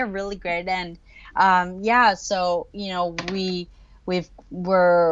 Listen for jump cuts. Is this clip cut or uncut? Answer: uncut